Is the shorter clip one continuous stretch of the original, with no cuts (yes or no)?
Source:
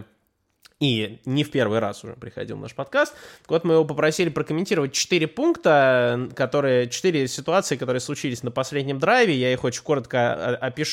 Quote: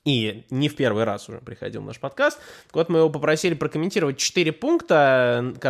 yes